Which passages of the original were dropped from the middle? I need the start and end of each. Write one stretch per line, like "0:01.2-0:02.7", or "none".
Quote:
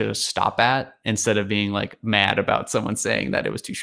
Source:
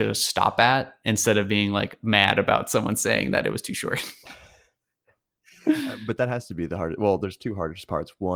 none